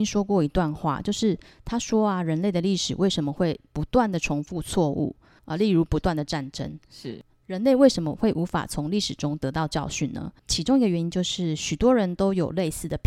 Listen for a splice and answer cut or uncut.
cut